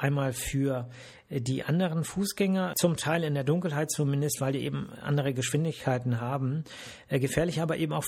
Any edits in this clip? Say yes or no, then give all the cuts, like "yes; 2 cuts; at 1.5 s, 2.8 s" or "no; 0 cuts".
yes; 1 cut; at 2.7 s